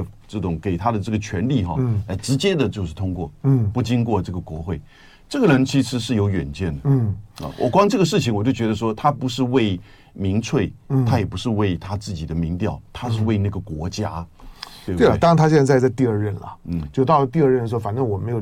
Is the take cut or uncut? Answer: cut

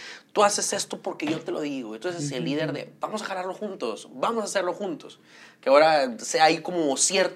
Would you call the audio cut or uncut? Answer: uncut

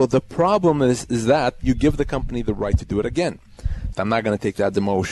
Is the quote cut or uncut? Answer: cut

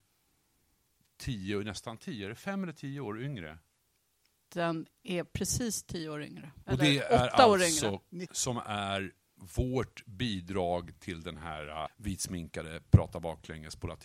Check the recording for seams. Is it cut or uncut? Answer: cut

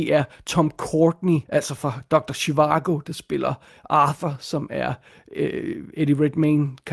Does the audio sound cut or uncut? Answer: cut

